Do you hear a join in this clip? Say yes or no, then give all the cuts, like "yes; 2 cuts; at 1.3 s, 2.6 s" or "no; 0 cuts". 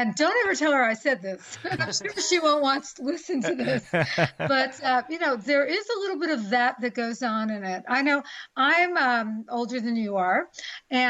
yes; 1 cut; at 1.8 s